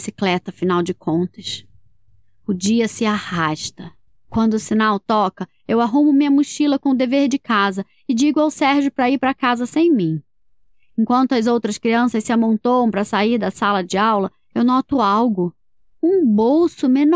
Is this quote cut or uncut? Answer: cut